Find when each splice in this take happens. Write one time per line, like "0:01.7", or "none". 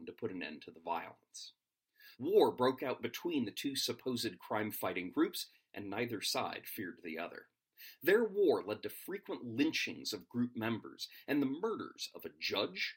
0:02.1